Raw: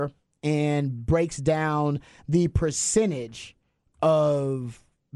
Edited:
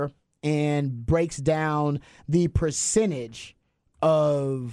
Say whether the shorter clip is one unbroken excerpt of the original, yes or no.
yes